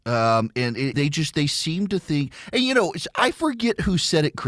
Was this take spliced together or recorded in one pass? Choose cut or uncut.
cut